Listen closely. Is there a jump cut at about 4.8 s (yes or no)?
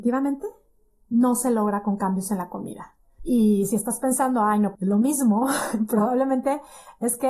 yes